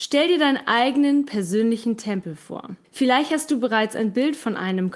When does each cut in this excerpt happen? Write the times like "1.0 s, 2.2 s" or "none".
2.8 s